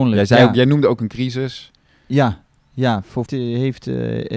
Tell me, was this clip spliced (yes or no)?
yes